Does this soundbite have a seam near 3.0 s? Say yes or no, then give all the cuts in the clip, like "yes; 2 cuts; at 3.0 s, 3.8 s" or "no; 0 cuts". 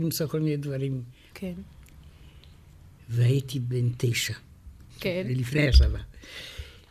no; 2 cuts; at 1.3 s, 4.9 s